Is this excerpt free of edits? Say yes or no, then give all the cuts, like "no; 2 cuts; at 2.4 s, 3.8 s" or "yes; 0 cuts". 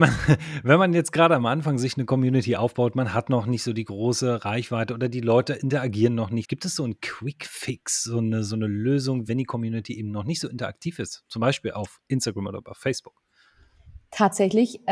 no; 2 cuts; at 6.4 s, 9.3 s